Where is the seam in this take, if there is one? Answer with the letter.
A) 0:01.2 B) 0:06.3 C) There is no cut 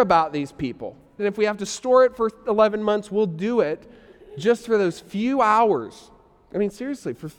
A